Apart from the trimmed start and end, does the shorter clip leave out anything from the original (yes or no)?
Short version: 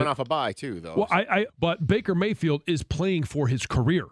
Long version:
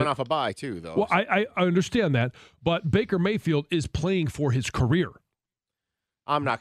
yes